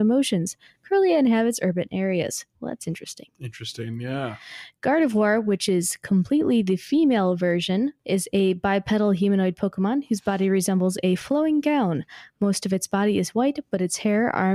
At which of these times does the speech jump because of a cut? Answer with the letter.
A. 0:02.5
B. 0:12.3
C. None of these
A